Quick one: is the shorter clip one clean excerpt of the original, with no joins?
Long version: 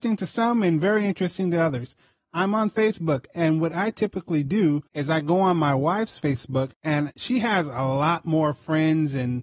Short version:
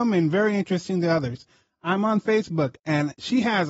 no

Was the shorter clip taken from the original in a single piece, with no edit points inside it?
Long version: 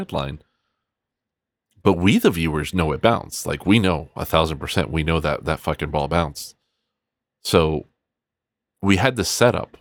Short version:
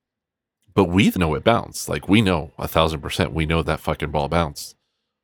no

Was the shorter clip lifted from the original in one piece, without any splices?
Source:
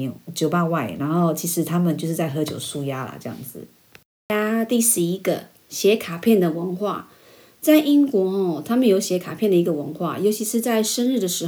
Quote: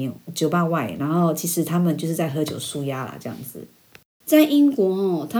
no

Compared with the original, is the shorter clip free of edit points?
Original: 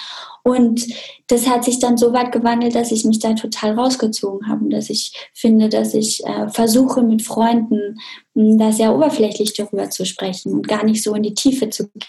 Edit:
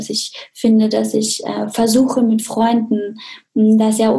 yes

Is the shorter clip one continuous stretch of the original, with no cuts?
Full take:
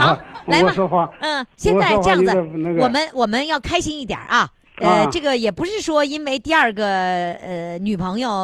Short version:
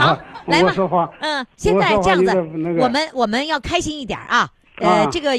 yes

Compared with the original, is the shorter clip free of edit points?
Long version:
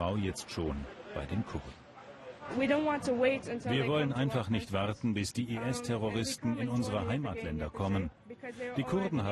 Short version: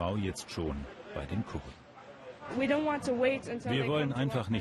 yes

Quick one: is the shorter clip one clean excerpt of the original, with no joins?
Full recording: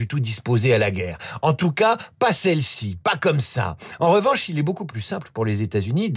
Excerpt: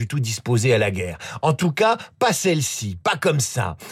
yes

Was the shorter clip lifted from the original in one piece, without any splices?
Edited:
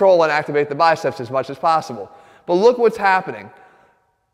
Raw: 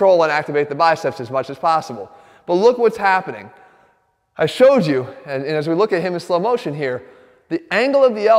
yes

